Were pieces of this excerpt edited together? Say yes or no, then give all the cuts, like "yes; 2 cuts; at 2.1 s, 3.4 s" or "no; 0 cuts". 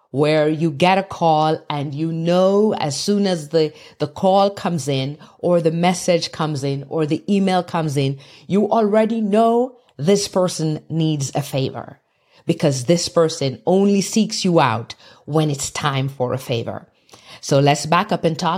no; 0 cuts